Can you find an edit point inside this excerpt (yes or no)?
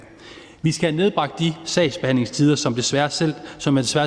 no